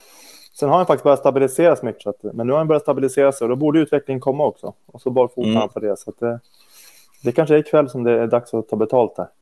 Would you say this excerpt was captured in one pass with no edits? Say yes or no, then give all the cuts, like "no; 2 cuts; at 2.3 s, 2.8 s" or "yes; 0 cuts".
no; 1 cut; at 2.0 s